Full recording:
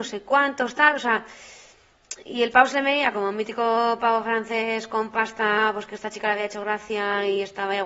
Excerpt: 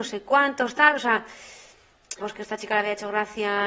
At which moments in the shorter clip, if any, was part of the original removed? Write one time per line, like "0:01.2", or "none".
0:02.2

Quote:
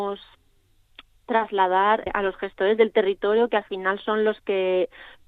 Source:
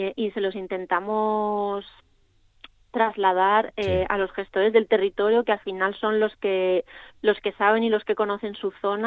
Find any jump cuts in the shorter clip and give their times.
0:02.1

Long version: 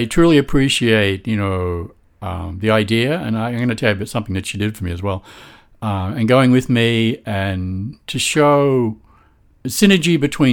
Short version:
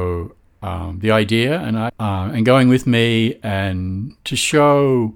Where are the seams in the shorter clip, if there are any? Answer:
0:01.9

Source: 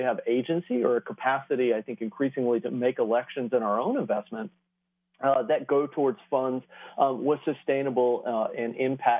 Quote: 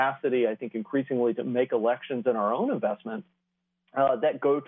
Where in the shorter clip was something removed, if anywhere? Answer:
none

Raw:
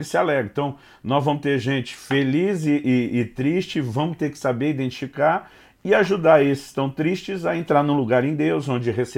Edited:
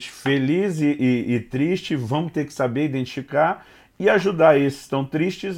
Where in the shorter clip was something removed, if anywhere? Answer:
none

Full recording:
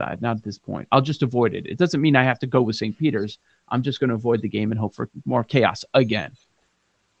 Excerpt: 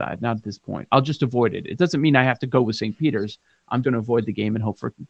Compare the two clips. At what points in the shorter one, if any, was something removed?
0:03.8

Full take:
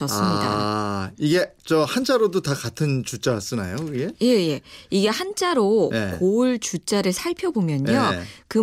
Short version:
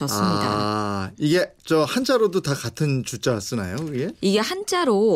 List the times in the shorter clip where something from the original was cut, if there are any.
0:04.2

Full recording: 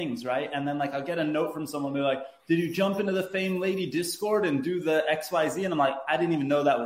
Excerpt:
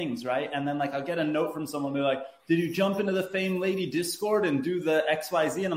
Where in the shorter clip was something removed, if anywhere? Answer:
none

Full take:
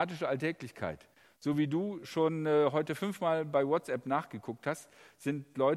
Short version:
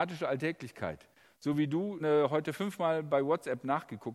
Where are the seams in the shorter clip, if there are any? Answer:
0:02.0

